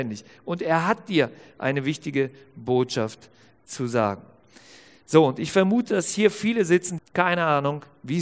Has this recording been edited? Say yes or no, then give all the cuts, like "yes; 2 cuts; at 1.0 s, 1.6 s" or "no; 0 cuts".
yes; 1 cut; at 7.0 s